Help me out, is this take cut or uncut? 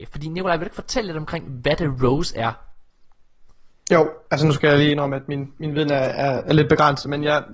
uncut